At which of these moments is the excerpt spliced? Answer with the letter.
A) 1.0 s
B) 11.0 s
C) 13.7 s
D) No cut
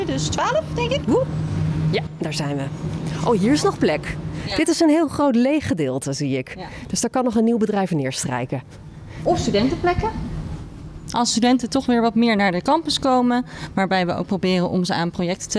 A